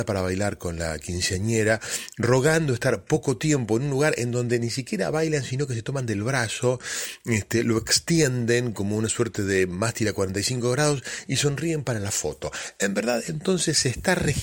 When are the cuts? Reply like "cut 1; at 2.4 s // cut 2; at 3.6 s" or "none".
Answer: none